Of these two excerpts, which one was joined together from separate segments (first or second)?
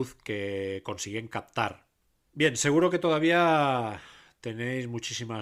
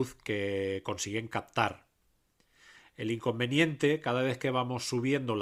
first